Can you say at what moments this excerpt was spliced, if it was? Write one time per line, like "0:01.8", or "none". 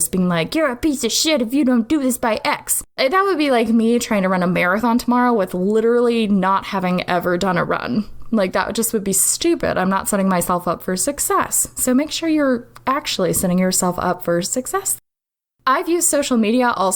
none